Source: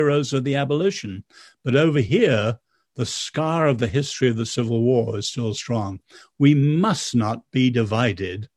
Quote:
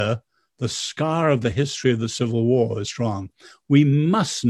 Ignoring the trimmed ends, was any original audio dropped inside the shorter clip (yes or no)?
yes